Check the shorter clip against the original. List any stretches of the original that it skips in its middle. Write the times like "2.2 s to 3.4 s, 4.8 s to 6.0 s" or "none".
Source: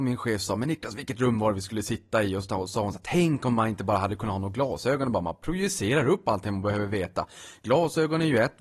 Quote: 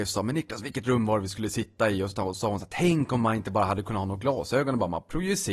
none